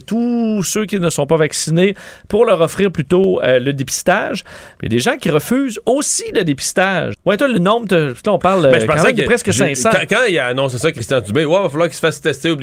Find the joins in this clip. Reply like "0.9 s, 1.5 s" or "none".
7.1 s

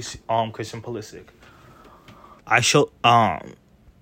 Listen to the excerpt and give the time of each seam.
2.4 s

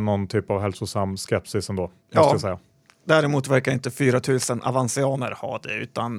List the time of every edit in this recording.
2.0 s

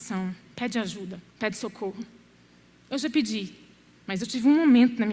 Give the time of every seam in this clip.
1.3 s, 4.0 s

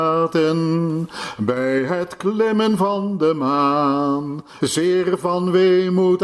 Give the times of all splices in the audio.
4.6 s

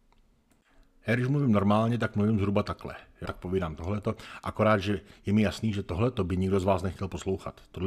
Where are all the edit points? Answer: 3.3 s

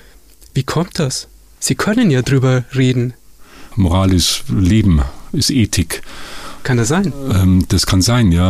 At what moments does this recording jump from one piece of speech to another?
1.6 s, 3.7 s, 6.6 s

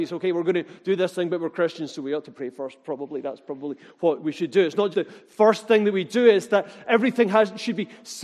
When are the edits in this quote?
4.9 s

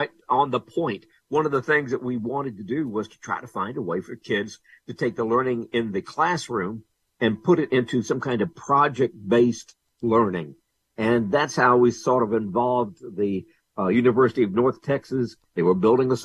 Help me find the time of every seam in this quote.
none

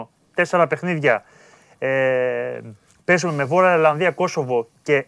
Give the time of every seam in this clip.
none

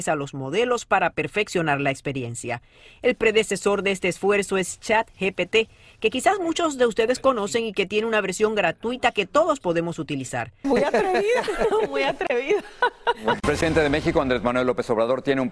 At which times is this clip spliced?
10.6 s

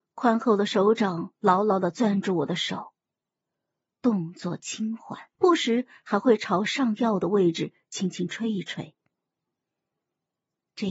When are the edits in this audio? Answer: 5.4 s

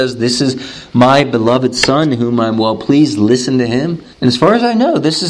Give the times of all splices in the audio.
4.1 s

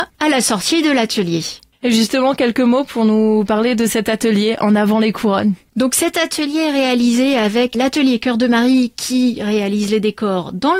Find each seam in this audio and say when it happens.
none

